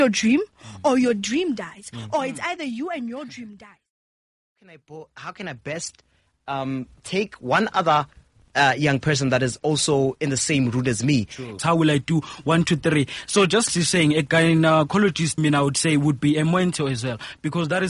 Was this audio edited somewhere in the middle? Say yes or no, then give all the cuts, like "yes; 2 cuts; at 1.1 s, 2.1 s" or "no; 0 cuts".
yes; 3 cuts; at 11.6 s, 13.7 s, 15.4 s